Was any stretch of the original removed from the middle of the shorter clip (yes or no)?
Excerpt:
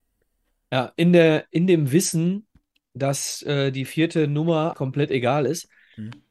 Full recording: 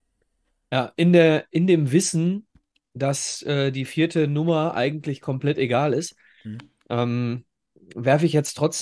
yes